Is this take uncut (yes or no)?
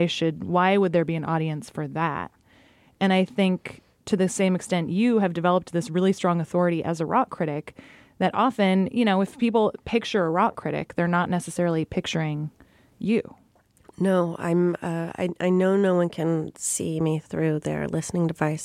yes